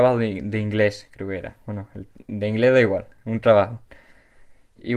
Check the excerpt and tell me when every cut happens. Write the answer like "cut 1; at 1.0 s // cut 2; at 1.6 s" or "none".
none